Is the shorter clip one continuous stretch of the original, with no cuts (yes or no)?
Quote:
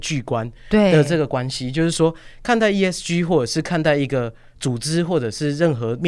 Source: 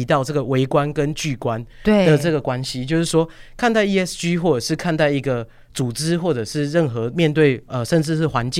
yes